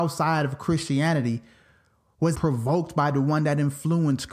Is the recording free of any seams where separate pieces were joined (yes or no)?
no